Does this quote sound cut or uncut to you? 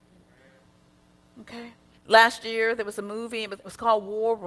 cut